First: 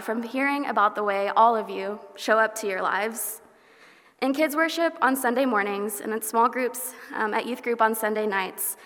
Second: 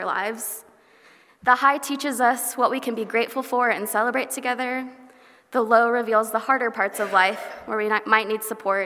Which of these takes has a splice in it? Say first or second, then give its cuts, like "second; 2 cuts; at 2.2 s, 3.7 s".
second; 1 cut; at 1.4 s